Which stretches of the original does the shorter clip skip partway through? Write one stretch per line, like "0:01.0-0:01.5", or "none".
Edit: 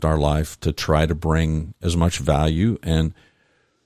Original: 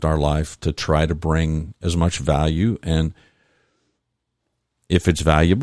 none